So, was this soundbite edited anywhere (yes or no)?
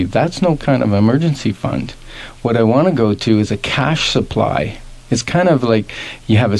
no